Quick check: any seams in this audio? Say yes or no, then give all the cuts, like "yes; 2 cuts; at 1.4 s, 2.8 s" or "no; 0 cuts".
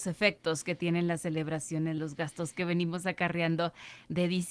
yes; 1 cut; at 2.0 s